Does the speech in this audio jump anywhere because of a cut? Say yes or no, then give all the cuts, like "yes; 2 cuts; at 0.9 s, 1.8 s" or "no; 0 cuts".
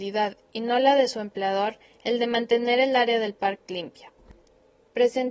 no; 0 cuts